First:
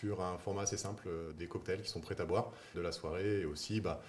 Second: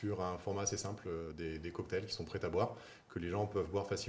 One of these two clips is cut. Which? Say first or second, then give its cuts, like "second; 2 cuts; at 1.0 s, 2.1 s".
first; 2 cuts; at 1.4 s, 2.7 s